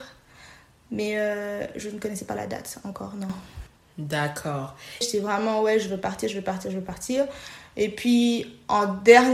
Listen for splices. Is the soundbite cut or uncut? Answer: cut